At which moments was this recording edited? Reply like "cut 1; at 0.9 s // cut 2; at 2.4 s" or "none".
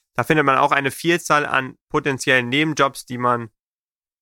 cut 1; at 1.8 s